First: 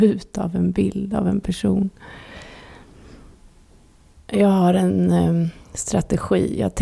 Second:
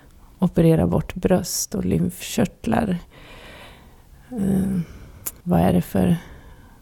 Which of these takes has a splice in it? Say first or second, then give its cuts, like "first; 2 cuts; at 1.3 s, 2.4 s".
second; 1 cut; at 5.4 s